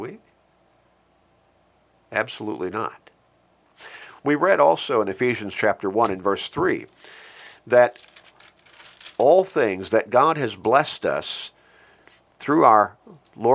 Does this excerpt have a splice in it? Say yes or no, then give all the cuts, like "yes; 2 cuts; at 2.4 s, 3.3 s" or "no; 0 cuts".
no; 0 cuts